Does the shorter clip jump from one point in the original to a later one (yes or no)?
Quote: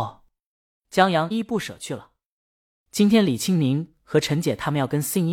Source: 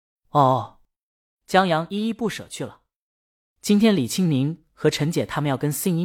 yes